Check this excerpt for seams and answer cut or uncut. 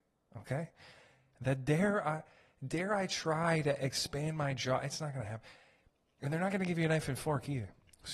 uncut